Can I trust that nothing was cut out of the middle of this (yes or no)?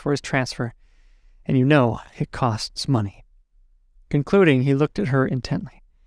yes